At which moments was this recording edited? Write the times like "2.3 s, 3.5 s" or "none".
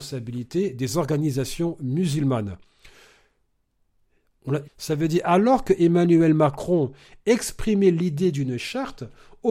4.6 s